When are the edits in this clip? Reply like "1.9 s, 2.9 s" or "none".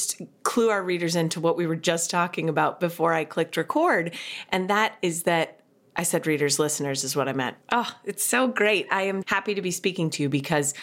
7.6 s, 9.2 s